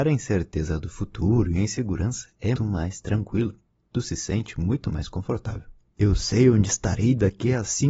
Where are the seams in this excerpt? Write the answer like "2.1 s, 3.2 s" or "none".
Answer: 2.6 s, 5.9 s